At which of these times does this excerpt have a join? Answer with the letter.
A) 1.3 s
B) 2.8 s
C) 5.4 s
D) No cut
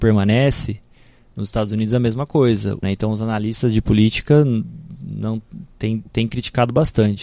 B